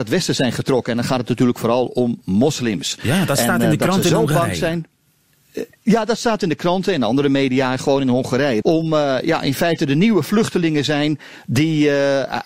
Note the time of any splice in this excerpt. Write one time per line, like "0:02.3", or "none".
0:08.6